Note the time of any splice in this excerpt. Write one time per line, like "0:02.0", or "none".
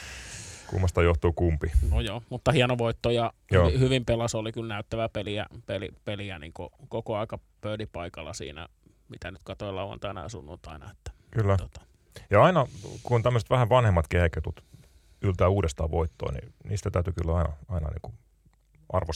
none